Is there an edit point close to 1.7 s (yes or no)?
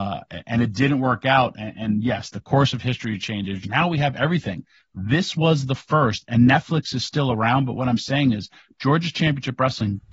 no